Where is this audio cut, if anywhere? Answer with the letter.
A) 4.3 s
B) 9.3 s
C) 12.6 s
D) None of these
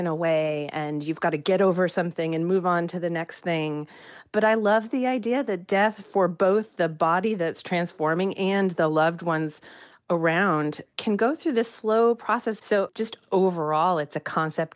C